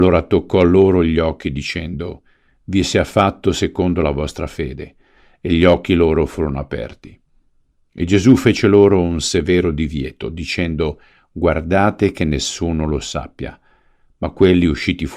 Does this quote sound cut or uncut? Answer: uncut